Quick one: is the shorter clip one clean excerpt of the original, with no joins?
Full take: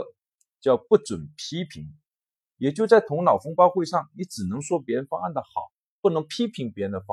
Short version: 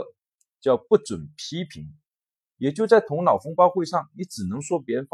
yes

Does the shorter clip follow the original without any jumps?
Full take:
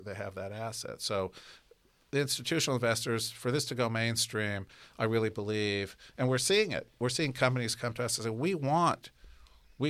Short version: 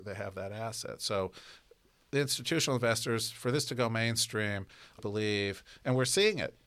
no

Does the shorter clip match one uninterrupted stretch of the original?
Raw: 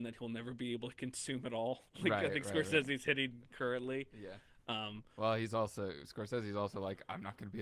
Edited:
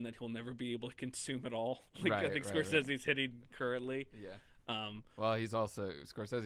yes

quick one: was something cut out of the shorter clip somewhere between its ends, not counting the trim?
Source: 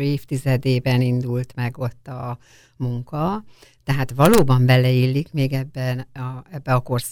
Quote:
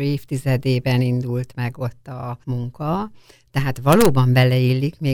yes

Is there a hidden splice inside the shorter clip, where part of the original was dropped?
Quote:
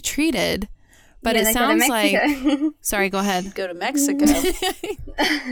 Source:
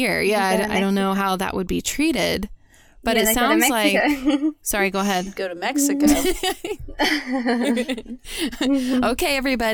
no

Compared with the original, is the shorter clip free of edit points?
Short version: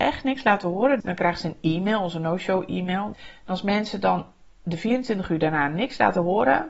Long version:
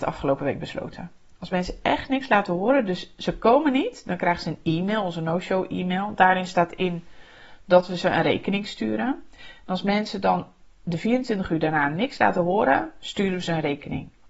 no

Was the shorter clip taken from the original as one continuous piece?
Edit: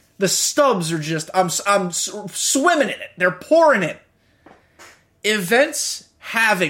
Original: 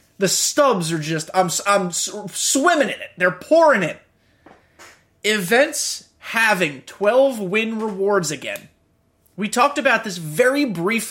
yes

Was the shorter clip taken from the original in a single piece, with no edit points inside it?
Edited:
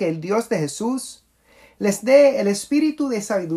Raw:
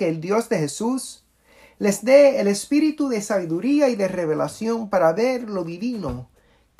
yes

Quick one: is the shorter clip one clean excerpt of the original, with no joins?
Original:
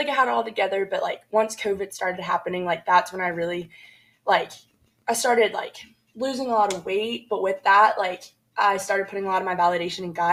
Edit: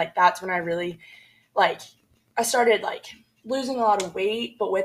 yes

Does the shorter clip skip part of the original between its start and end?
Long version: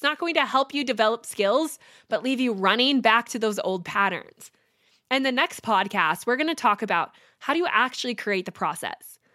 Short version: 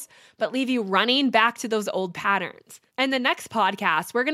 yes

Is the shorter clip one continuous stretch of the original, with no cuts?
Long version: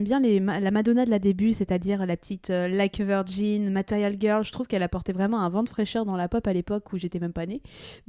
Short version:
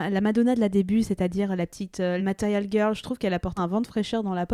no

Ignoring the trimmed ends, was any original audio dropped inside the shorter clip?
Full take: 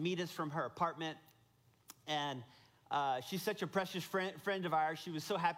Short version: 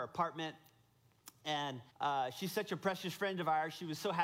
yes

